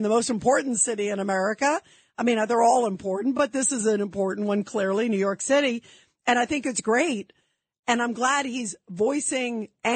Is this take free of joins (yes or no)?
yes